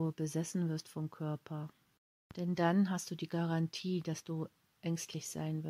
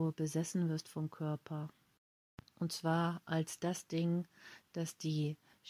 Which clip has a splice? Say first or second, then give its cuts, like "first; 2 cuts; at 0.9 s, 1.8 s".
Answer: first; 1 cut; at 2.3 s